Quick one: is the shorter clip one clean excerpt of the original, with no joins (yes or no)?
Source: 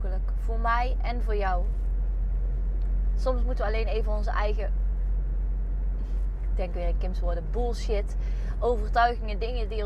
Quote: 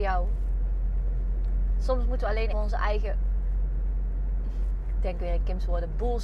no